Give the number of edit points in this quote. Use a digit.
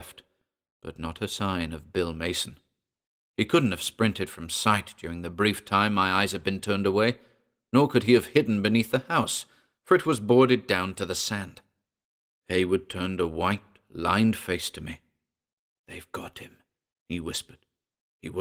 1